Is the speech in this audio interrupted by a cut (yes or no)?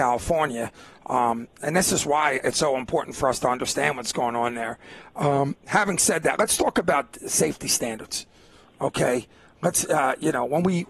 no